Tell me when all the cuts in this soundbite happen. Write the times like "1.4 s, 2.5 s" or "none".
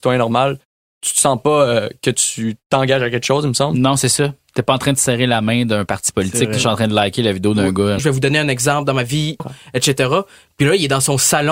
8.0 s, 9.4 s